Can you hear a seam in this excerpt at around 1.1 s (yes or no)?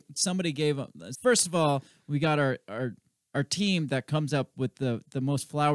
yes